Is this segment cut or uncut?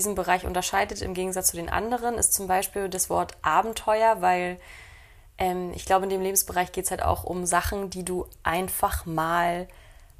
uncut